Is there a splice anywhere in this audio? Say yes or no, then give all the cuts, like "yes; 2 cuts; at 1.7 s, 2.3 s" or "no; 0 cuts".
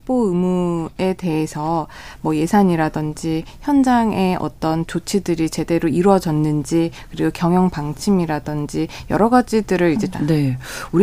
yes; 1 cut; at 10.1 s